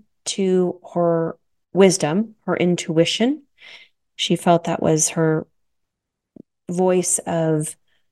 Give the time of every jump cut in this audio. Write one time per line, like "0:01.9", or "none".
none